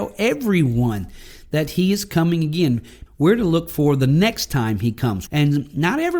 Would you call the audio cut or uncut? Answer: cut